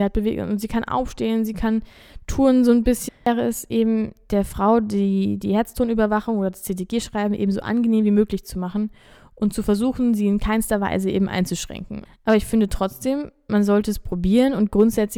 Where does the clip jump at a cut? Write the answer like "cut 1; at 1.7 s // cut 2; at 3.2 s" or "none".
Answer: cut 1; at 3.1 s // cut 2; at 12.0 s

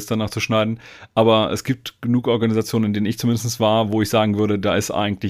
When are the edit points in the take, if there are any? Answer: none

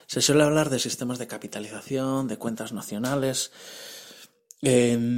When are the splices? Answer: none

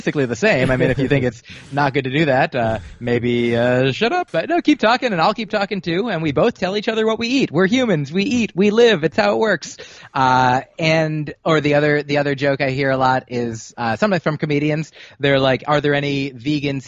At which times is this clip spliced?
cut 1; at 4.3 s

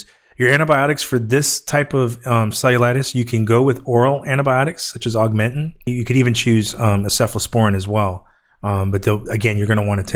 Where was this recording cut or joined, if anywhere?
cut 1; at 5.9 s

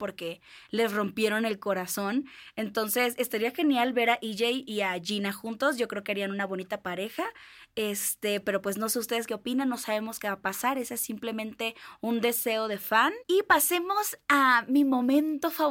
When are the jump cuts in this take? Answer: none

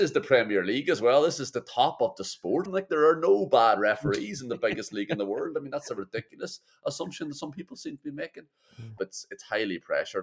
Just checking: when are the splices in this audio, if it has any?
cut 1; at 2.7 s // cut 2; at 9.0 s

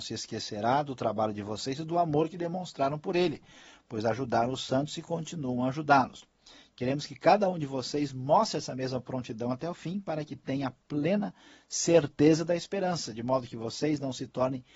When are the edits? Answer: none

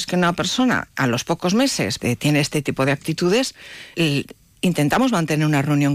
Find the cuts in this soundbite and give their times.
cut 1; at 2.0 s // cut 2; at 3.9 s

